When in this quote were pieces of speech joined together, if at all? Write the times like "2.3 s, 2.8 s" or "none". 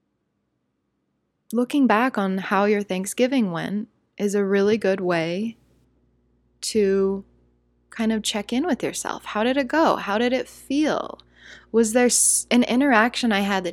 none